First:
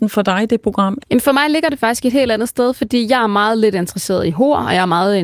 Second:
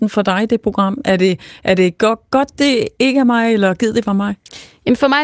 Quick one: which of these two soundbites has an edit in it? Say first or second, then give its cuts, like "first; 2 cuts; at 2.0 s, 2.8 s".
first; 1 cut; at 1.0 s